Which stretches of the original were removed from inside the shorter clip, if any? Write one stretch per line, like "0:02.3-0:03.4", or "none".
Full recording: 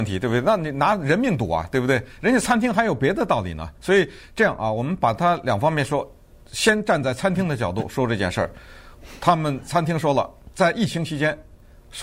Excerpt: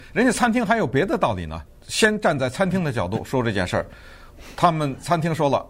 0:03.7-0:06.3